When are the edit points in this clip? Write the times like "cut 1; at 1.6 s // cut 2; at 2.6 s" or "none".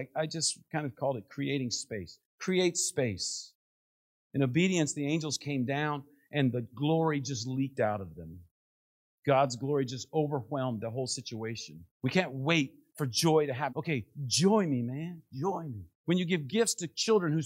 cut 1; at 11.9 s // cut 2; at 13.7 s // cut 3; at 16.0 s